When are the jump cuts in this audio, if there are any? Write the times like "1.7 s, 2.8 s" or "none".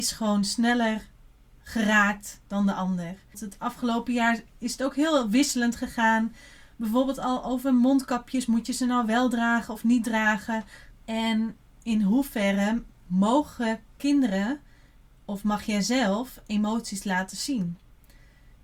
3.3 s, 10.9 s